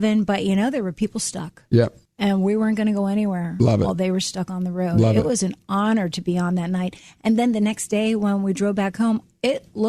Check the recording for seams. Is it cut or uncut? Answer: uncut